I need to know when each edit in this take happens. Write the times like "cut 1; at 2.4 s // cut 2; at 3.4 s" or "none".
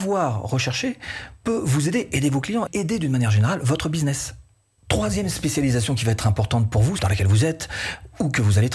cut 1; at 2.7 s // cut 2; at 7.0 s